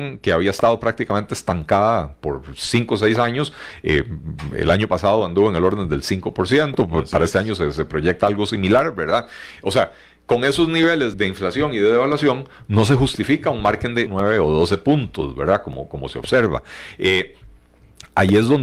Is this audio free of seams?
no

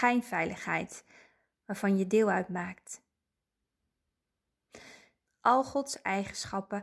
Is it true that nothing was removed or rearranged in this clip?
no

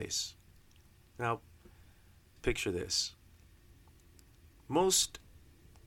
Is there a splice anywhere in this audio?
yes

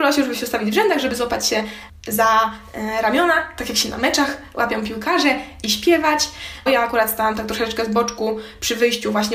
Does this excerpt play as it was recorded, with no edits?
no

